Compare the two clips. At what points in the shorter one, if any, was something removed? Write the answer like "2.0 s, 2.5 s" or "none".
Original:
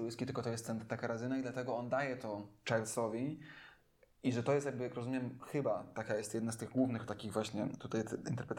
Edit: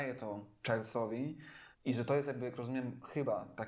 1.7 s